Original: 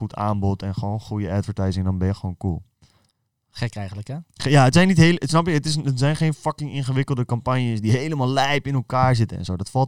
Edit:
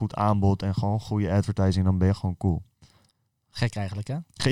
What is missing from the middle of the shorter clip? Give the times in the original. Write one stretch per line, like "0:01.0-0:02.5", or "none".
none